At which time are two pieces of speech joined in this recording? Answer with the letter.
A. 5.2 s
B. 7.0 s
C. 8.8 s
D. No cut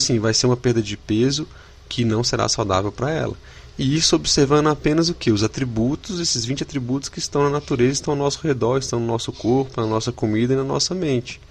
D